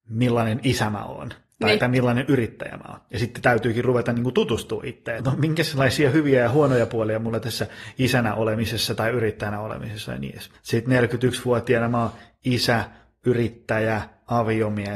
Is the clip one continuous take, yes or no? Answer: no